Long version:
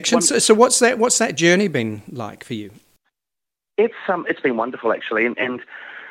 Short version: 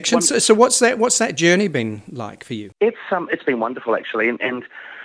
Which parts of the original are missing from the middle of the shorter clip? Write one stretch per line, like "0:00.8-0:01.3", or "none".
0:02.7-0:03.7